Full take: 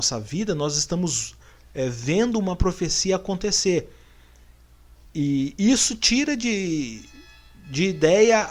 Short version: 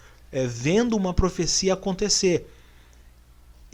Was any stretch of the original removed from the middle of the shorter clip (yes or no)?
no